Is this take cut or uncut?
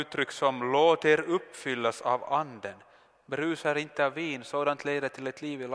uncut